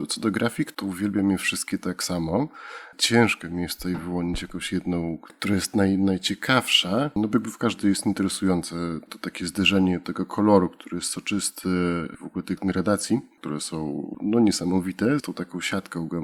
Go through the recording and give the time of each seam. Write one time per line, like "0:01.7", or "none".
0:15.2

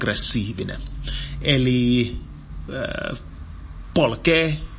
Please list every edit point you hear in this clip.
none

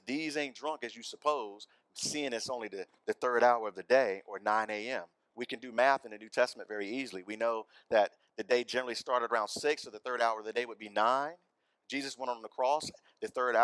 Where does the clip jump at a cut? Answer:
none

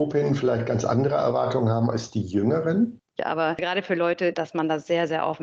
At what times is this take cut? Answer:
0:03.2
0:04.3

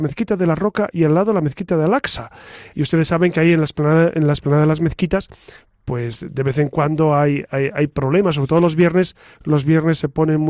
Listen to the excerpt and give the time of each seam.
0:02.7

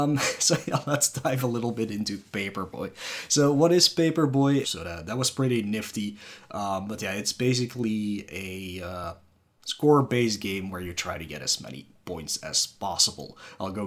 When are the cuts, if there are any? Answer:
0:04.6

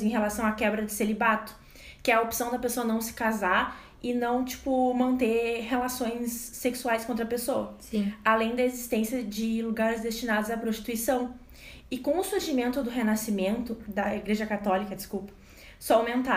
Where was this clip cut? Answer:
0:11.8
0:13.8

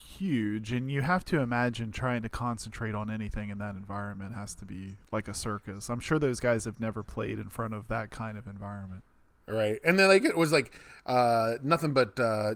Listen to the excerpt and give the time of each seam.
none

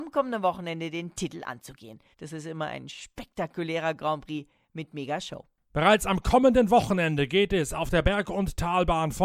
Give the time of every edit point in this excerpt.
0:02.1

